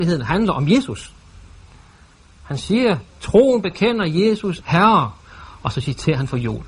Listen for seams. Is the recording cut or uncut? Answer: cut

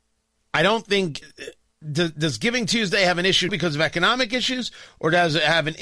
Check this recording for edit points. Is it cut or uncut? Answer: cut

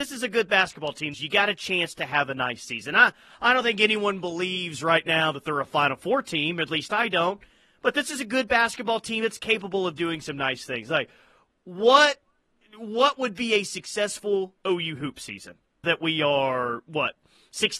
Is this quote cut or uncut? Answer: cut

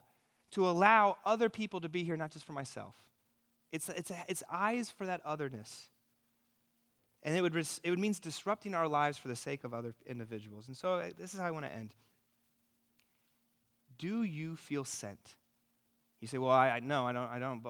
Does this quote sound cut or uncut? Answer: uncut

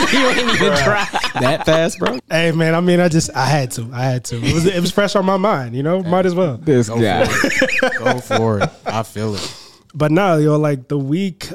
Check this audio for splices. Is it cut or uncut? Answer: cut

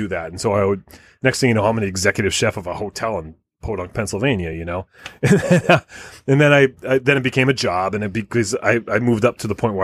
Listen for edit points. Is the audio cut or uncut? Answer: uncut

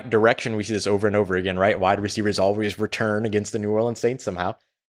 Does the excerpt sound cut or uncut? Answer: uncut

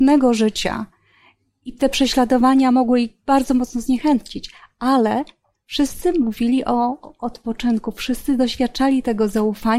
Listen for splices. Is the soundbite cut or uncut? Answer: uncut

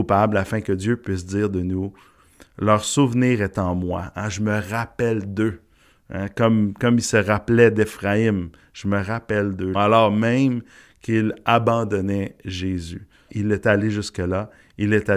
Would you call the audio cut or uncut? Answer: cut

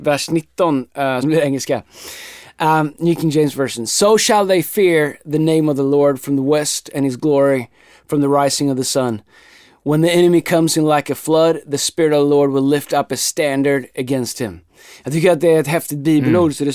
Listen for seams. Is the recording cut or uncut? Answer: cut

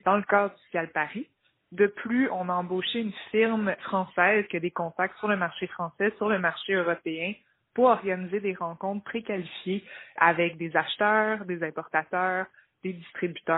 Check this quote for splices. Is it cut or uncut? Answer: uncut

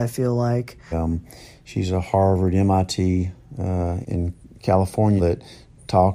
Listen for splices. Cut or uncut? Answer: cut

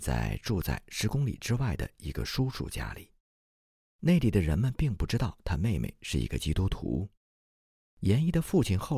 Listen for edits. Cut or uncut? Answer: uncut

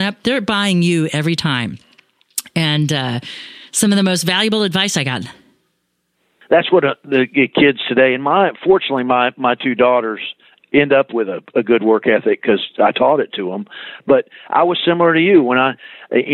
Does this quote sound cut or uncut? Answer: uncut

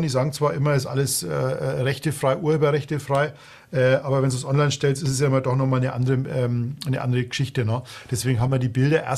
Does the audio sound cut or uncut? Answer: uncut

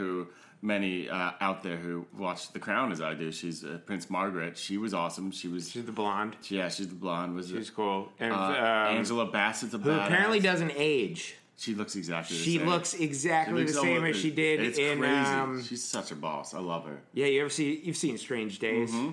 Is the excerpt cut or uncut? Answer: uncut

